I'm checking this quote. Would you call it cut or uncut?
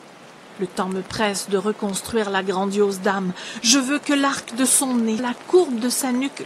cut